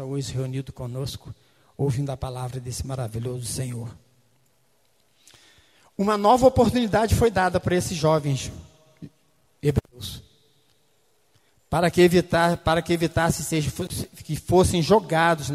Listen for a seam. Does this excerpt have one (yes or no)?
no